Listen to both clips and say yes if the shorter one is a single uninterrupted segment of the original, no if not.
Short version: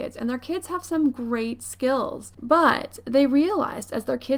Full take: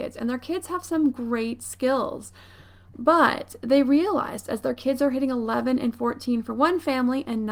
no